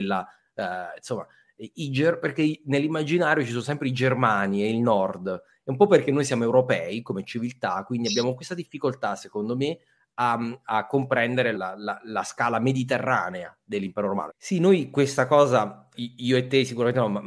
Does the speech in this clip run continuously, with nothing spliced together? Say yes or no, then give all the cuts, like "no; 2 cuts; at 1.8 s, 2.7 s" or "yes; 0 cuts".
no; 3 cuts; at 11.5 s, 14.3 s, 15.9 s